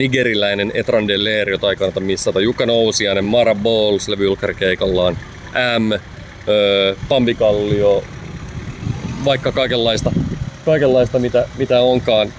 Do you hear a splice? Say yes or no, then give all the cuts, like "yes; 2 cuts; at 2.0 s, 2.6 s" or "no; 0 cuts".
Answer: no; 0 cuts